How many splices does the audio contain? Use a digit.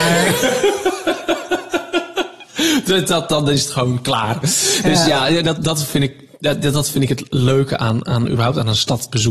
1